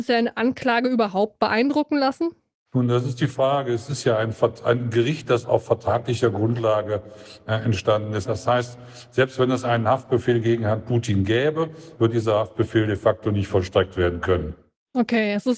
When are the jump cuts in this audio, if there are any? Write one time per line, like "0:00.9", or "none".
0:08.3
0:12.0